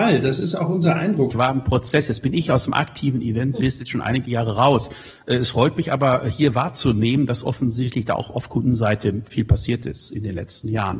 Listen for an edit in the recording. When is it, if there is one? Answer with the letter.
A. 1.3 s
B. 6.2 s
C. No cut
A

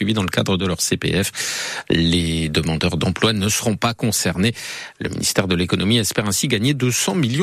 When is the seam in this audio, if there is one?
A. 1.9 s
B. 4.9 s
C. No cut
C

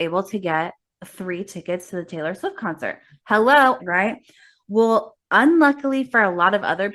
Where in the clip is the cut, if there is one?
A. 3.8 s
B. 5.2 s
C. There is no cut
A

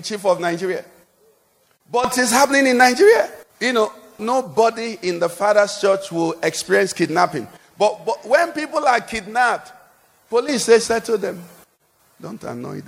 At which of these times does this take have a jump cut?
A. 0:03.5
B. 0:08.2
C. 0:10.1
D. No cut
A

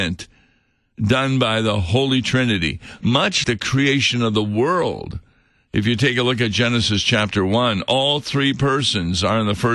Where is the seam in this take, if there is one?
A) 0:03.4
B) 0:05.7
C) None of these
A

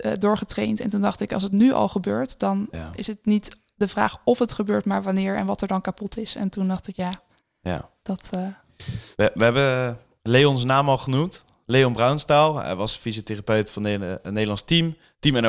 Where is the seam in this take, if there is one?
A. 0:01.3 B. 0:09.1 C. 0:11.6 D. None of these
B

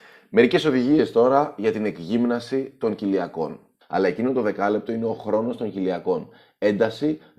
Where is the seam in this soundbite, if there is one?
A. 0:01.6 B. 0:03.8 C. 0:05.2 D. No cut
B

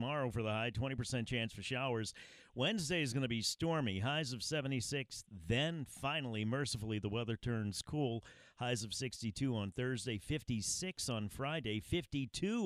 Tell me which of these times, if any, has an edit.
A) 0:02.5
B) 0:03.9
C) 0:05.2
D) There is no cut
D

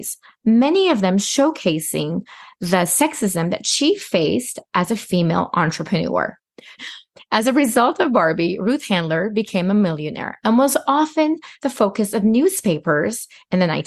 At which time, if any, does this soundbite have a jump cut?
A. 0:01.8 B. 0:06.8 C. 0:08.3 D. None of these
B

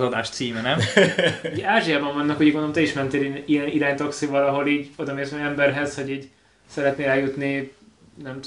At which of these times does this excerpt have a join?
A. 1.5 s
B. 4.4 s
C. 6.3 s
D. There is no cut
D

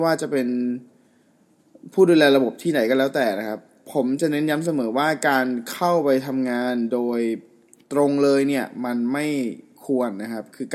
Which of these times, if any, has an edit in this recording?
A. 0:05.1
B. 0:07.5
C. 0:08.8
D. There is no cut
D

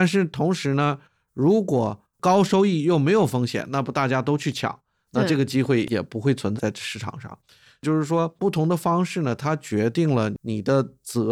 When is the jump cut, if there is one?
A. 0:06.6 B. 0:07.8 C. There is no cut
A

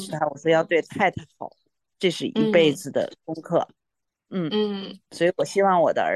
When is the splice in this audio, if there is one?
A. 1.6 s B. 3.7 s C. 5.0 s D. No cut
B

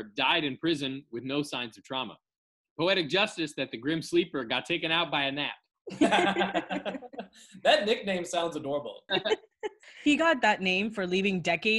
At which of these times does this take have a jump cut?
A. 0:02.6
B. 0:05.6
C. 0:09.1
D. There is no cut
C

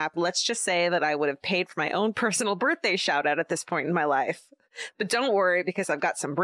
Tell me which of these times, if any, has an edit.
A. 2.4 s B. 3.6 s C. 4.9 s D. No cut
D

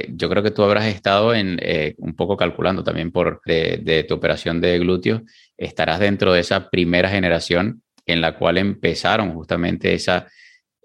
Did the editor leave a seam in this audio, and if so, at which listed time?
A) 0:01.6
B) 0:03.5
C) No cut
B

